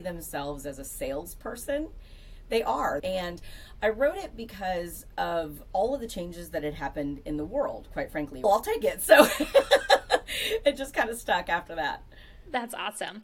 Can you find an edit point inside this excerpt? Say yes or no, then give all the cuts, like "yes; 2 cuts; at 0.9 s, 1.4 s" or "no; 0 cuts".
yes; 2 cuts; at 3.0 s, 8.4 s